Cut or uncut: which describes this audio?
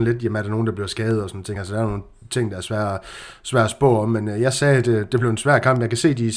uncut